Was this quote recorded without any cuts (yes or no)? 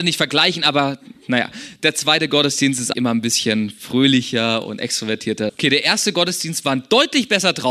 no